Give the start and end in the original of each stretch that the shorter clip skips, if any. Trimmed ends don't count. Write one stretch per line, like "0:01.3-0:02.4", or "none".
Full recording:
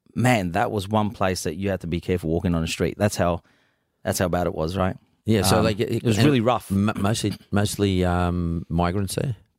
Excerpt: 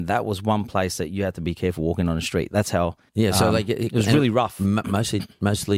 0:03.5-0:05.2